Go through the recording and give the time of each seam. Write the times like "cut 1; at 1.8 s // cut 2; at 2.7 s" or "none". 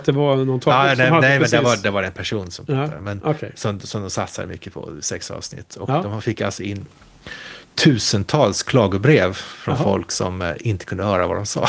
none